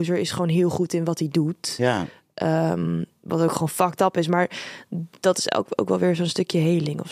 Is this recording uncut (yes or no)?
yes